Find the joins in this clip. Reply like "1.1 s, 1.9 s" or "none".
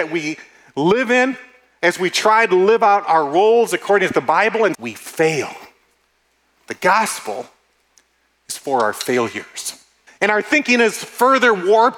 4.7 s, 10.1 s